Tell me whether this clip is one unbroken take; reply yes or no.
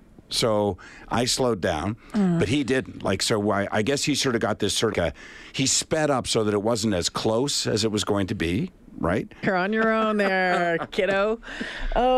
no